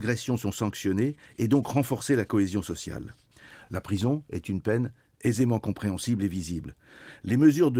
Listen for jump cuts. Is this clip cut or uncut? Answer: uncut